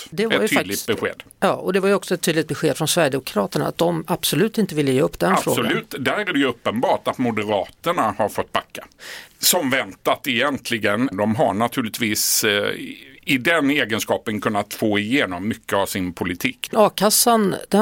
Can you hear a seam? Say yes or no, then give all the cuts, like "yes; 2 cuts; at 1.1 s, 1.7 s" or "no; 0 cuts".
yes; 2 cuts; at 9.3 s, 11.1 s